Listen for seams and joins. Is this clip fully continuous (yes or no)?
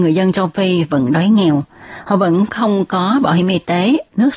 yes